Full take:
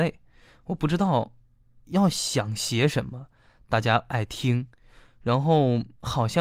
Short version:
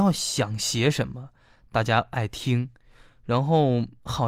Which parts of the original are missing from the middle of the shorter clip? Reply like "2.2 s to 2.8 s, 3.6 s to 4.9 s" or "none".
none